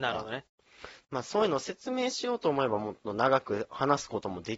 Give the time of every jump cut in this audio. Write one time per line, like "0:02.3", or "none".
none